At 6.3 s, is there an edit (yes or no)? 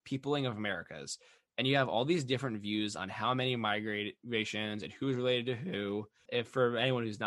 yes